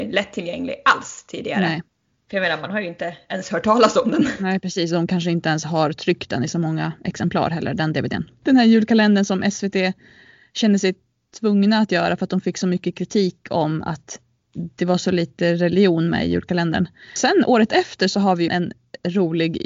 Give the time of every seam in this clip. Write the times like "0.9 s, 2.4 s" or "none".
8.4 s, 17.2 s, 18.5 s